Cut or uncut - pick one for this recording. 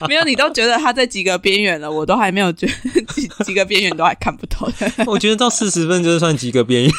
uncut